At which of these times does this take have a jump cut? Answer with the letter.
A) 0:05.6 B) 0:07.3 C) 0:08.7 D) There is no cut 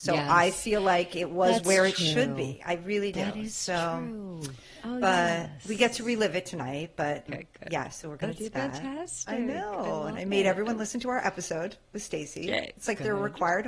B